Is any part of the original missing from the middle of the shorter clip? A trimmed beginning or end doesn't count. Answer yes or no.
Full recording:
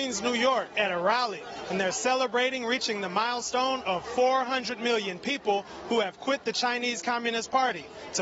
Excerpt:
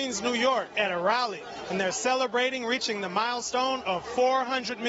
no